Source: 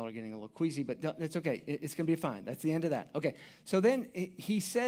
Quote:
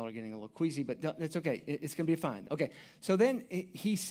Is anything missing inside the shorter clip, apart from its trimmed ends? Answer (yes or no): yes